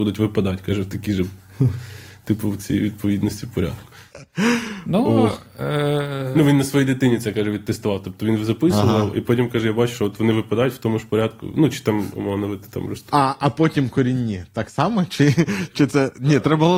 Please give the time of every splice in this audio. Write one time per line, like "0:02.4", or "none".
0:13.1